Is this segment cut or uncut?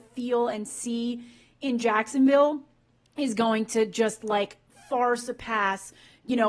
uncut